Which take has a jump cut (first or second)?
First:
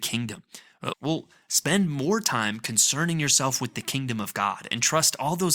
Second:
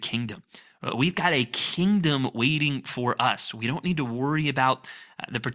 first